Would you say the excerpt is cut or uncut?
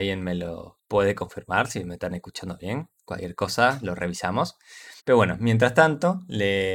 cut